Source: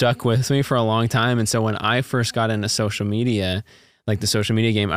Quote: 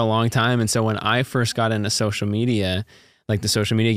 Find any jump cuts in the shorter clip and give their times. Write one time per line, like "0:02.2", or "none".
none